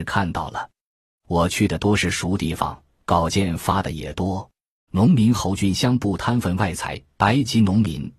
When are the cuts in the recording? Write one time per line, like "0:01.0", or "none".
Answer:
0:04.9
0:07.2